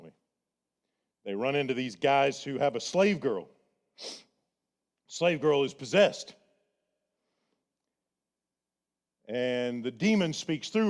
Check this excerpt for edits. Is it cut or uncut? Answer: cut